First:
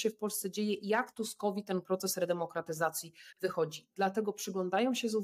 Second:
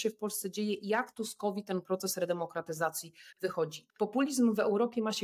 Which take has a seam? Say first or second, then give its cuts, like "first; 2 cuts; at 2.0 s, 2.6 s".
second; 1 cut; at 3.9 s